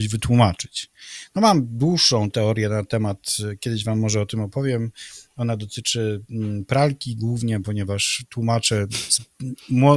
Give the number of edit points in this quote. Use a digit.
0